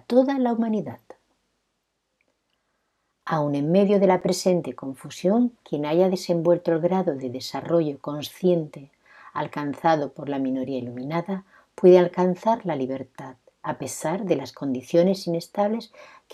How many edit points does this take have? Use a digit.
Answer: 0